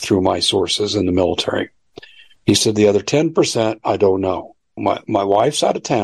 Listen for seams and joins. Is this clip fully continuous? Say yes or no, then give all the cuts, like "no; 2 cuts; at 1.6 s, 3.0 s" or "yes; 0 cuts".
no; 1 cut; at 4.8 s